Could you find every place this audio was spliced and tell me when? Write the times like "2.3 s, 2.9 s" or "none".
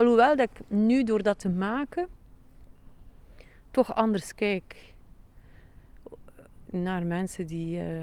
6.7 s